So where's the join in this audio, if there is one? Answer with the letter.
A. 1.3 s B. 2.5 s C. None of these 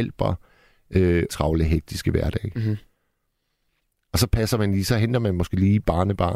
A